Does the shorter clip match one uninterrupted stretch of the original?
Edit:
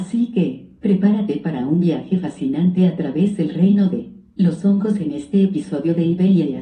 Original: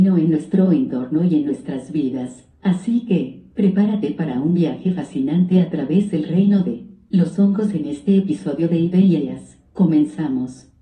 yes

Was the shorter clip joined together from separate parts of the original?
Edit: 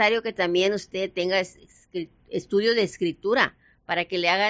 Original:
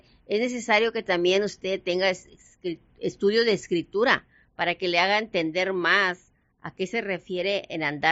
no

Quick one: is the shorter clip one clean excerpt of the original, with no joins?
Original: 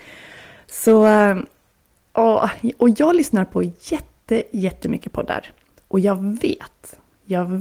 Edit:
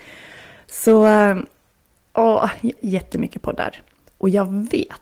no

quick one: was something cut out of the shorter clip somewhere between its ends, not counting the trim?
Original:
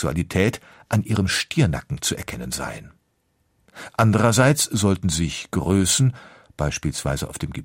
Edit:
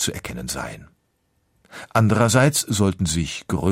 no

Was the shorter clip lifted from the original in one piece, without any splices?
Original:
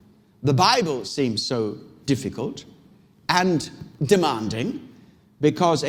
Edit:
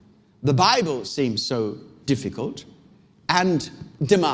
yes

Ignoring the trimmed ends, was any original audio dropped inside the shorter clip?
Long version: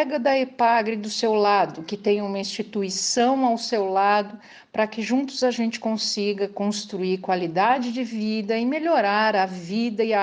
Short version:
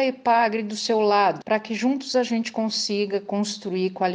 yes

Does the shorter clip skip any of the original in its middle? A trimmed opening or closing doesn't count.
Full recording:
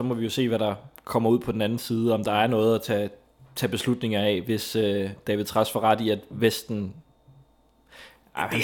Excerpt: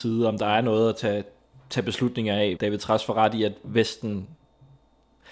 yes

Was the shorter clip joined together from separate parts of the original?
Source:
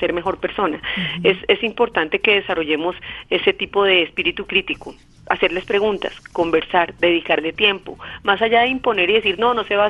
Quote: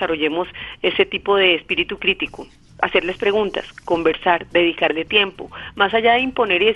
no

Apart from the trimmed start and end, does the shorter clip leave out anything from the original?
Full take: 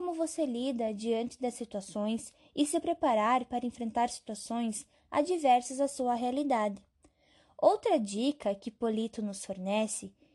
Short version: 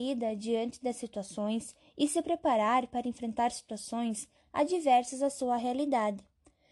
no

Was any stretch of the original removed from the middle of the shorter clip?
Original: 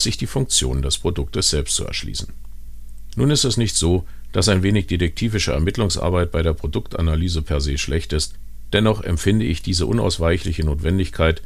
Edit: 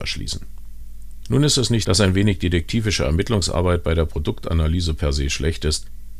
yes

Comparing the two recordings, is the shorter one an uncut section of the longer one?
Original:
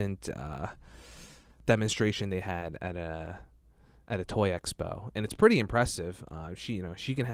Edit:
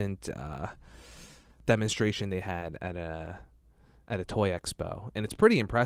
yes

